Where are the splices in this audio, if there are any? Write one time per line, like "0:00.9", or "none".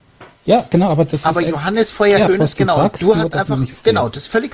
0:02.3